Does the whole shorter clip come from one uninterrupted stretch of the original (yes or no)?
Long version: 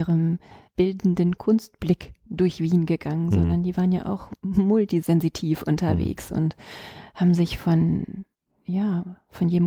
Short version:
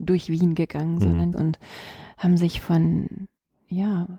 no